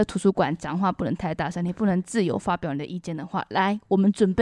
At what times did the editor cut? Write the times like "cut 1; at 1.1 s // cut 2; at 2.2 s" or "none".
none